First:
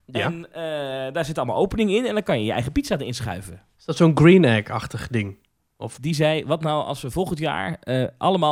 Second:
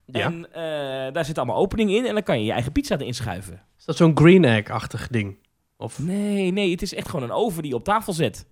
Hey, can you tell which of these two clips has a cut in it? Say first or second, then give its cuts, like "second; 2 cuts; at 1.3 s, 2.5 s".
first; 1 cut; at 6.0 s